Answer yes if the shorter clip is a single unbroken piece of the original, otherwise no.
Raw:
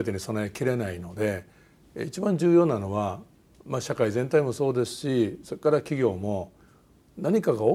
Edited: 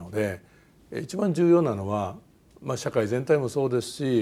yes